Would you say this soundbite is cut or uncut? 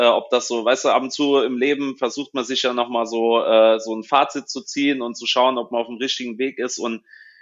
uncut